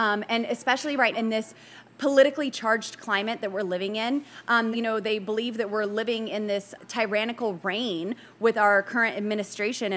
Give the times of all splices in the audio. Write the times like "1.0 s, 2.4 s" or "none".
1.1 s, 4.7 s